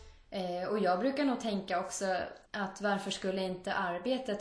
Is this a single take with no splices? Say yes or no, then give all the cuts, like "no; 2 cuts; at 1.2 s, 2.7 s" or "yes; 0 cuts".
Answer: no; 1 cut; at 2.5 s